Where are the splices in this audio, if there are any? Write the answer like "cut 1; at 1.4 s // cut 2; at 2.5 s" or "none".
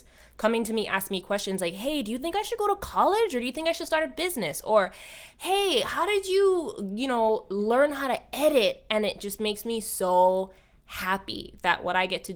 none